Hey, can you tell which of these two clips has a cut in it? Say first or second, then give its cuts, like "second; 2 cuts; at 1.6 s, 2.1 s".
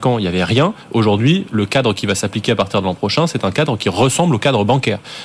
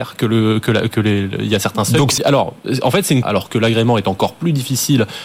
second; 2 cuts; at 2.2 s, 3.2 s